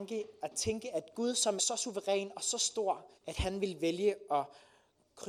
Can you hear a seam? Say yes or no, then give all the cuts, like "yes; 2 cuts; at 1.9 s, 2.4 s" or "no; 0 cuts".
yes; 2 cuts; at 1.6 s, 3.2 s